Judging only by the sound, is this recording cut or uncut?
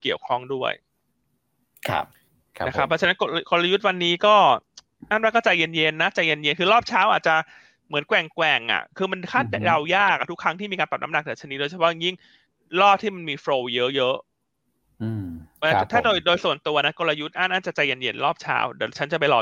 uncut